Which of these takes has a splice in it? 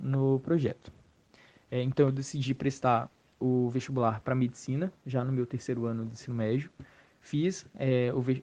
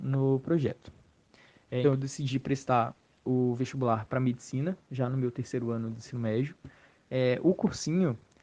second; 2 cuts; at 1.8 s, 7.0 s

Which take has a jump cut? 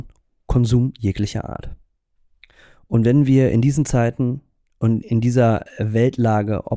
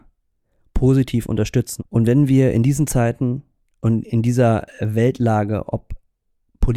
second; 1 cut; at 1.8 s

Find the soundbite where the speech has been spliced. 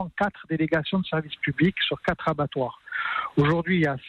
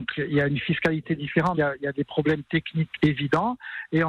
second; 2 cuts; at 1.5 s, 2.9 s

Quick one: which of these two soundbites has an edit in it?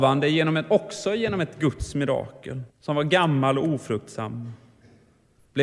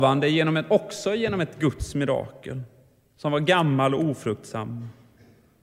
first; 1 cut; at 2.7 s

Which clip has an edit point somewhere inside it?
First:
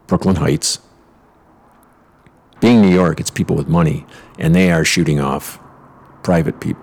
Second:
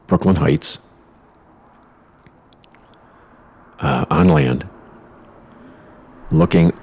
first; 1 cut; at 2.6 s

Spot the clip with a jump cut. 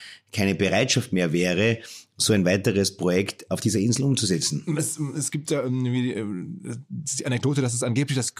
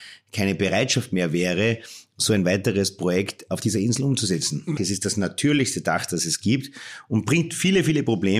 second; 1 cut; at 4.8 s

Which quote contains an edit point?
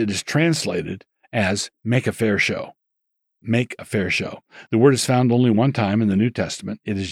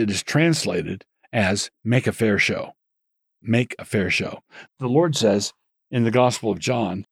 second; 1 cut; at 4.7 s

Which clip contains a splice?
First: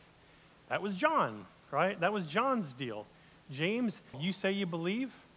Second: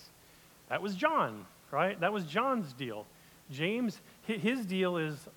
first; 1 cut; at 4.1 s

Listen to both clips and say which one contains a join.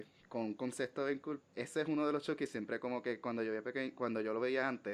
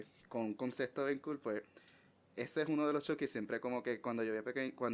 first; 1 cut; at 1.4 s

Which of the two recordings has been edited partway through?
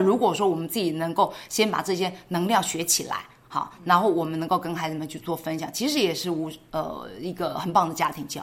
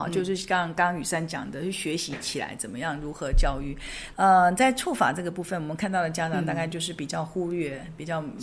second; 1 cut; at 4.1 s

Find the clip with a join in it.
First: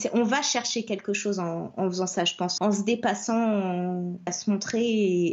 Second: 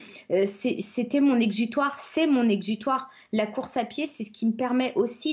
first; 2 cuts; at 2.6 s, 4.3 s

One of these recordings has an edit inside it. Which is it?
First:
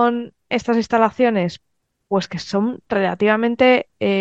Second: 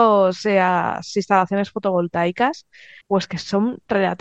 second; 1 cut; at 3.0 s

